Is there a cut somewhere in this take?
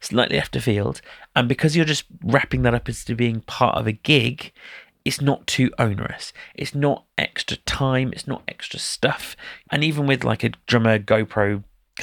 yes; 1 cut; at 9.6 s

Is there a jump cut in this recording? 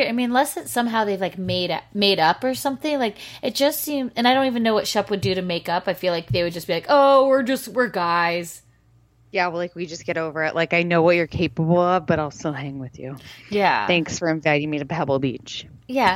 no; 0 cuts

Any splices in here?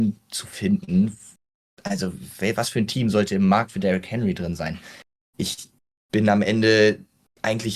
no; 0 cuts

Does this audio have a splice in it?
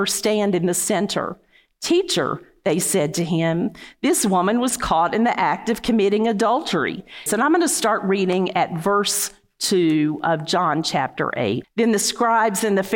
yes; 2 cuts; at 7.3 s, 11.6 s

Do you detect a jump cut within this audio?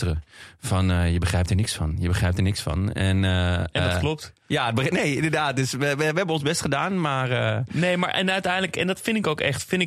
no; 0 cuts

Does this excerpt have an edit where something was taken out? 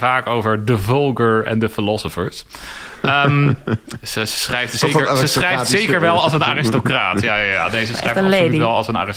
no; 0 cuts

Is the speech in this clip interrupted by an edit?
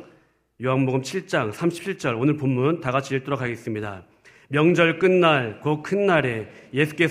no; 0 cuts

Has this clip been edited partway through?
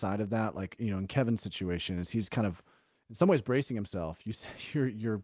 no; 0 cuts

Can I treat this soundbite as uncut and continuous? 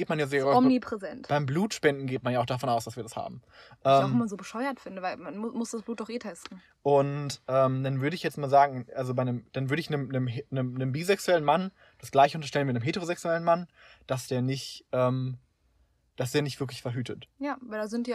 yes; 0 cuts

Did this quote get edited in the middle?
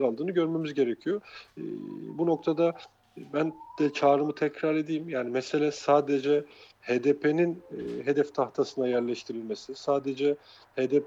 no; 0 cuts

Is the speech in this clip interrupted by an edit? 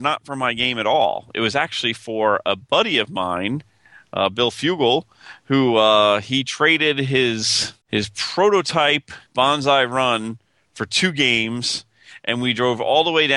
yes; 2 cuts; at 7.8 s, 9.3 s

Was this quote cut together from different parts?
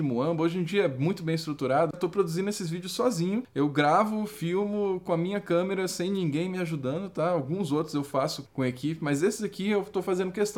yes; 2 cuts; at 1.9 s, 8.5 s

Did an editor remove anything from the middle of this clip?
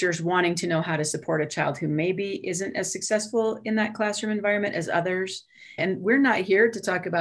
yes; 1 cut; at 5.8 s

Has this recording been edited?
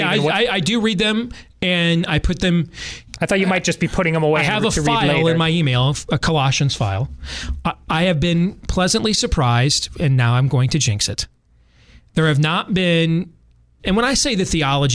yes; 1 cut; at 13.8 s

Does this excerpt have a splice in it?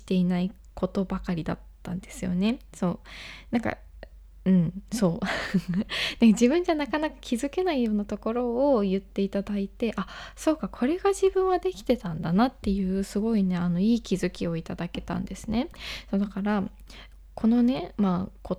no; 0 cuts

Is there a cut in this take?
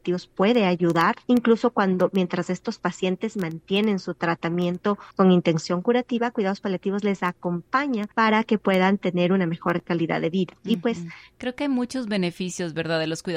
yes; 1 cut; at 11.3 s

